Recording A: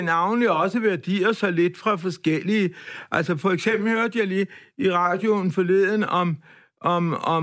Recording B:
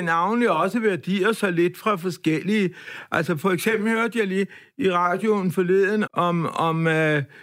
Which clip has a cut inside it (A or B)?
B